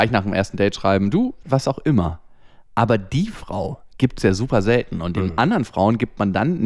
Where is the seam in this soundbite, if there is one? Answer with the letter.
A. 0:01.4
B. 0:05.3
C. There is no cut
A